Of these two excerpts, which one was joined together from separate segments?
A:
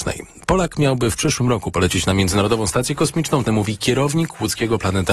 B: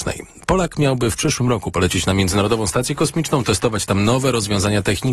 A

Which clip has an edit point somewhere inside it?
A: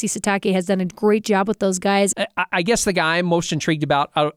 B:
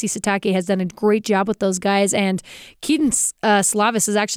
A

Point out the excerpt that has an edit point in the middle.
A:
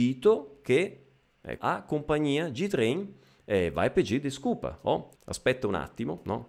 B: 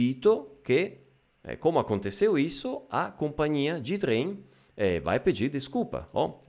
A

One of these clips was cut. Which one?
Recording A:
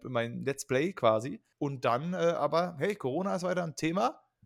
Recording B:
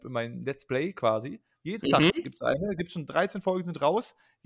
A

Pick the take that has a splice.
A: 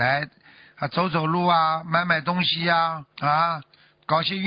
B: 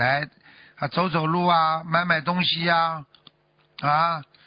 A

